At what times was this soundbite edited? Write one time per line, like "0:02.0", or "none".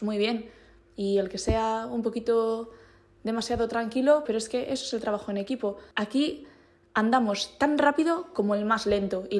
0:04.3
0:05.9